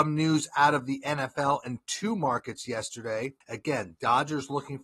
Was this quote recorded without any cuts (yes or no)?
no